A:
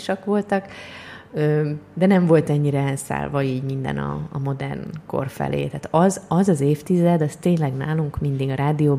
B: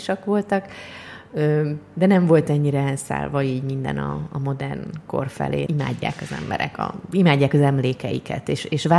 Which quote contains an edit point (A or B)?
B